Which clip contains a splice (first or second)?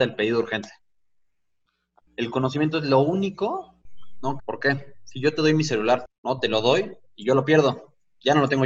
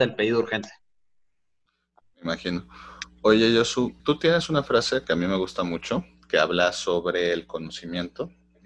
first